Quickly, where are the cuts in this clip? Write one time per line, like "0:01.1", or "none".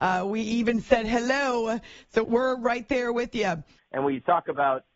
0:02.2
0:03.8